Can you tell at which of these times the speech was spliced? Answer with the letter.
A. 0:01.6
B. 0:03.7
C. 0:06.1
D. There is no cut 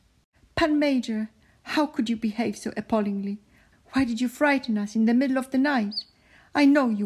B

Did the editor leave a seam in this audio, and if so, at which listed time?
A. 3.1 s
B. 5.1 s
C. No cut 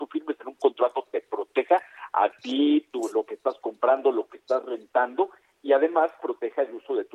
C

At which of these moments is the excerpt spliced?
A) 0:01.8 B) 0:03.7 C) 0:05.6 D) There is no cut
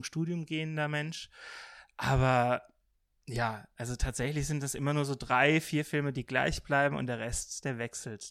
D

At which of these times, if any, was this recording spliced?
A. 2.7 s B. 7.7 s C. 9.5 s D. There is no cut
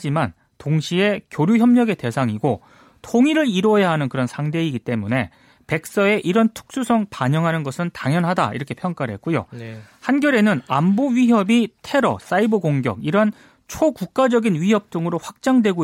D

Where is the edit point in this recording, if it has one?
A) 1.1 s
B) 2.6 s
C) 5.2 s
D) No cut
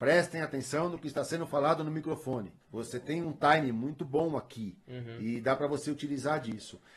B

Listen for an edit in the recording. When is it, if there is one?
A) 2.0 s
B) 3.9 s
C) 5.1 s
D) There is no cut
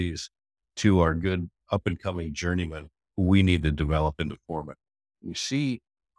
C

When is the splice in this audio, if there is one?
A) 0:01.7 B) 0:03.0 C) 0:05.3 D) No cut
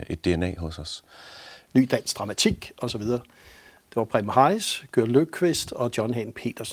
A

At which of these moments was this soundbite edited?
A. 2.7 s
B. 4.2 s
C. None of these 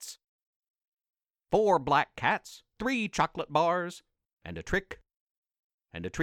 B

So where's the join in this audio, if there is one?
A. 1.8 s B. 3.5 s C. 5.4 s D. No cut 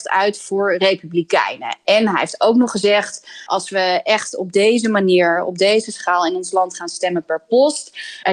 B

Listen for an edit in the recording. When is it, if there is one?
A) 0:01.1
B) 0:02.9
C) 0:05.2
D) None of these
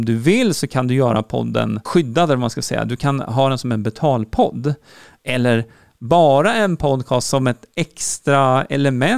D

